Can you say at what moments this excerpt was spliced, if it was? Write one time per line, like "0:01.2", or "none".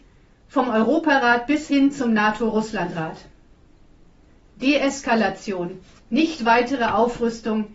none